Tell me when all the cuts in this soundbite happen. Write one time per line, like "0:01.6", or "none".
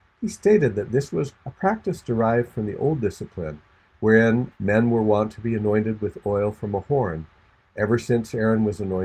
0:01.3
0:04.5